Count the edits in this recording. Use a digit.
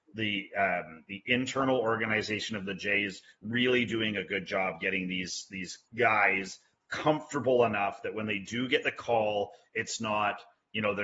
1